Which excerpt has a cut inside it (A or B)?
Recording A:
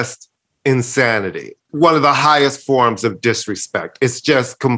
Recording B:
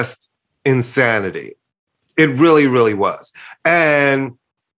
A